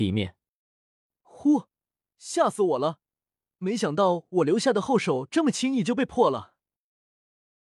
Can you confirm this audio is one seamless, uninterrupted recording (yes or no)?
yes